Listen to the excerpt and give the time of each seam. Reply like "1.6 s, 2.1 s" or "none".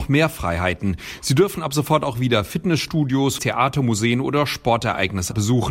3.4 s